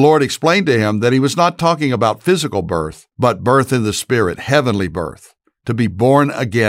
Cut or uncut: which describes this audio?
cut